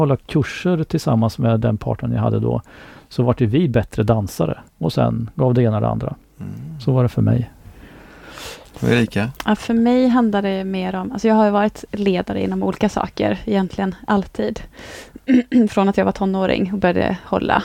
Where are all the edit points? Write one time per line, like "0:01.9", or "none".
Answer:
0:04.7